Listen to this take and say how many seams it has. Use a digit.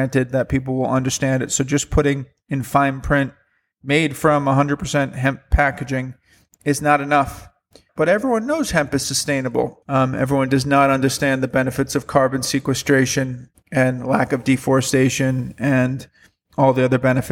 2